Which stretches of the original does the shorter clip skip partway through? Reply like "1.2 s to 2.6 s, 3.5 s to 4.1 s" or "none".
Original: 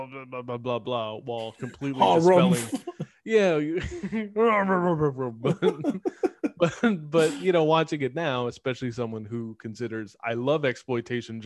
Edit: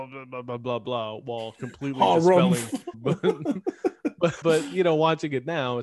2.9 s to 5.3 s, 6.8 s to 7.1 s